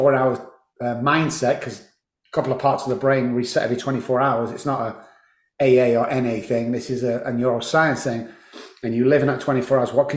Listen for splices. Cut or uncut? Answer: uncut